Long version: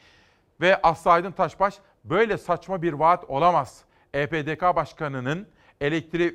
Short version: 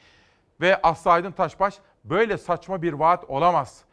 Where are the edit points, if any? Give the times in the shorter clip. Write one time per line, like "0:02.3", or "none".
none